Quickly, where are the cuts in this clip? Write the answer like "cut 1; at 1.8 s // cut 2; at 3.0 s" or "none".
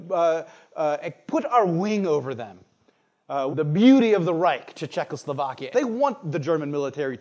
cut 1; at 3.5 s // cut 2; at 5.7 s